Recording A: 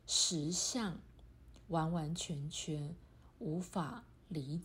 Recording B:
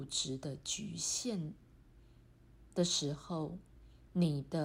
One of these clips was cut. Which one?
A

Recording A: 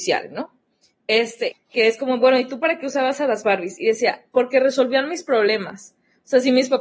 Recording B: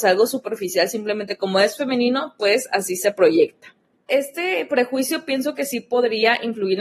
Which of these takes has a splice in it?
A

